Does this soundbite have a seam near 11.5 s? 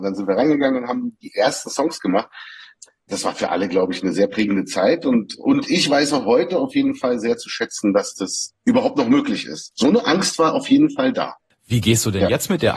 yes; 2 cuts; at 9.7 s, 11.5 s

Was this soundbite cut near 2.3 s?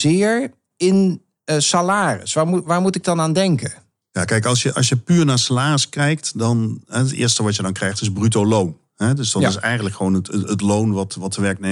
no; 0 cuts

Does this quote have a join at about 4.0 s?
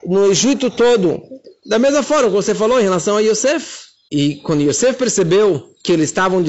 no; 1 cut; at 1.6 s

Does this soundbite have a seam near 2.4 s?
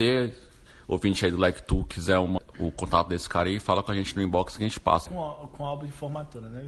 yes; 2 cuts; at 2.4 s, 5.1 s

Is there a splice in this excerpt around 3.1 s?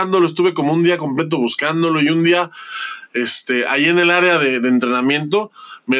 no; 0 cuts

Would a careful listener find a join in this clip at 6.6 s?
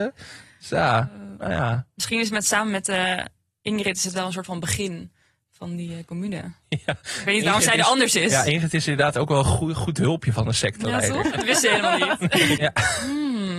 no; 2 cuts; at 11.2 s, 12.6 s

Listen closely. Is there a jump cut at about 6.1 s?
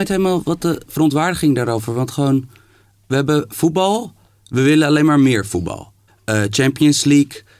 yes; 1 cut; at 6.1 s

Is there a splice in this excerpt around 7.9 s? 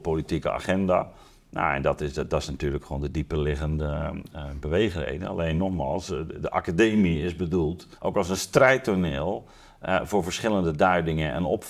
yes; 1 cut; at 7.9 s

